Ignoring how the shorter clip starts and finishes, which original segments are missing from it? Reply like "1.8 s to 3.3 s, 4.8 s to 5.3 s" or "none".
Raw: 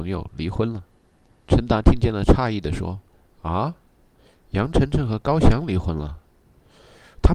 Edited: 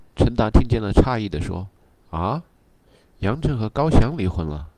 4.7 s to 4.9 s